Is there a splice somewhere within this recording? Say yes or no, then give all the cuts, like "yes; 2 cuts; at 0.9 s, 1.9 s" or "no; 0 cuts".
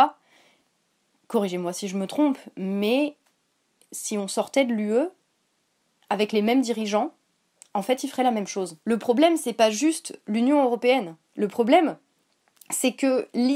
no; 0 cuts